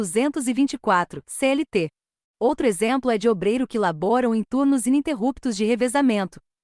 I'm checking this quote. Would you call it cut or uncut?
uncut